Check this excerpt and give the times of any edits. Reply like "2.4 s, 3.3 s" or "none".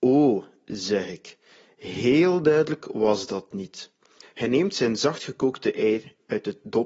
4.2 s